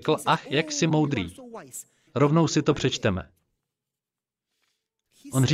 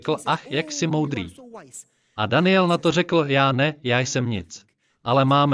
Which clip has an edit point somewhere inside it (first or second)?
first